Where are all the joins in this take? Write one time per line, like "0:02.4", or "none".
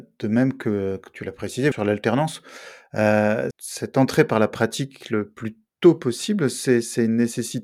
0:01.7
0:03.5

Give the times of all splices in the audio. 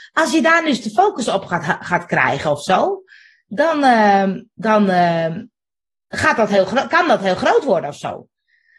none

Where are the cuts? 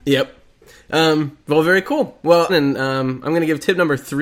0:02.5

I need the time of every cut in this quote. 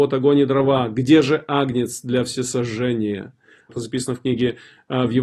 0:03.7

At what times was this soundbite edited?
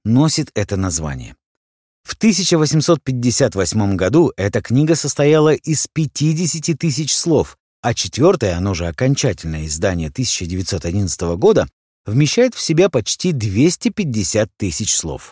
none

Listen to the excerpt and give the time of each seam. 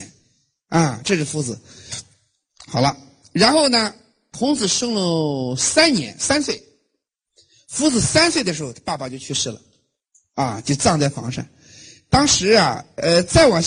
none

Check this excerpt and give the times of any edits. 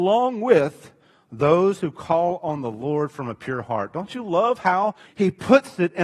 0:05.0

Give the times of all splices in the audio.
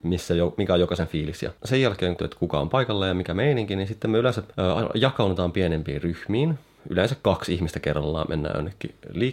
0:02.2

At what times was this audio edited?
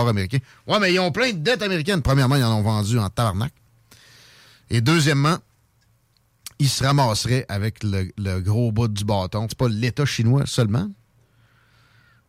0:09.5

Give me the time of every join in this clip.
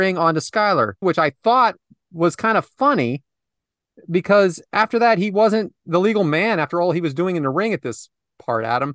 0:01.0

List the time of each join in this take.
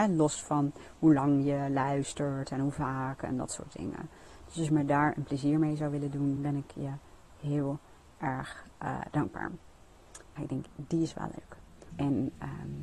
0:06.4
0:10.4
0:11.9

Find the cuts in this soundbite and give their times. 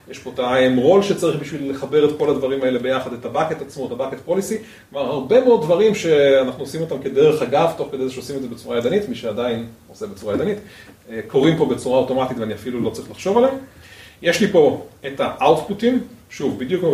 none

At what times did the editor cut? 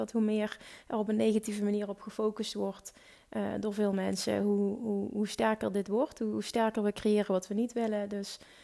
none

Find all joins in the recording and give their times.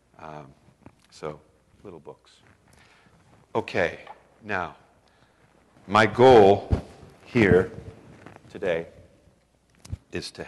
0:01.7
0:05.8

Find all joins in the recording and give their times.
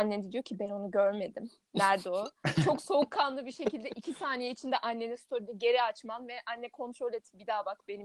none

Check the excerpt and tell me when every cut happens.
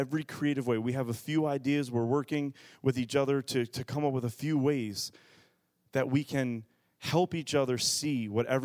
none

